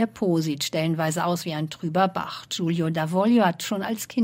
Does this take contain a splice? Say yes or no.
no